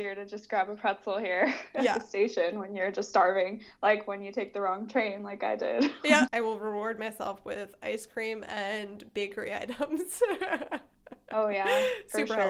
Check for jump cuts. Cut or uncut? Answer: cut